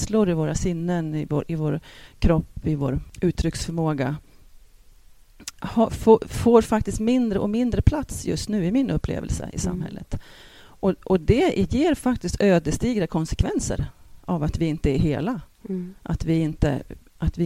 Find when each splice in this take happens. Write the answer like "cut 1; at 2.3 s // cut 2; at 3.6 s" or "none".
none